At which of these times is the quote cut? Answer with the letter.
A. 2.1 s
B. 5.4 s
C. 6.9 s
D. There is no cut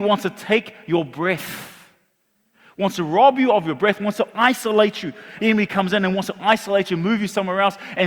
B